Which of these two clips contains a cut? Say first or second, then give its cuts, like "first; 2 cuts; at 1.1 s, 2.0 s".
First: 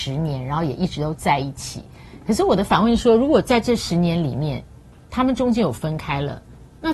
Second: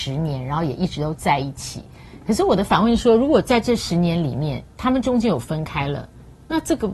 second; 1 cut; at 4.7 s